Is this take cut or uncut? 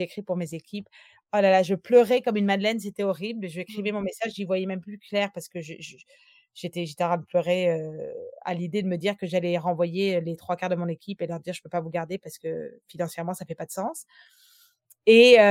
uncut